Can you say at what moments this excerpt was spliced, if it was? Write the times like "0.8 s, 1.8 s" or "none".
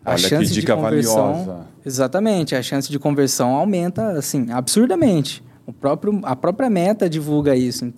none